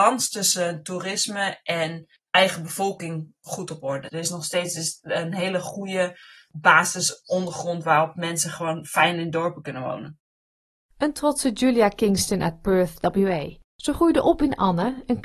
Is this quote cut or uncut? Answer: cut